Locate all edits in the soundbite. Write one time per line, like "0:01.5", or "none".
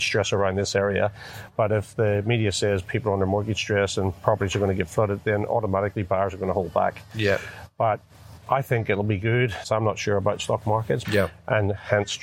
0:09.6
0:11.0